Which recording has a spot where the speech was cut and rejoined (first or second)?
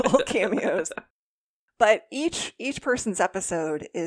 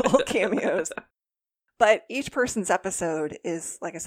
second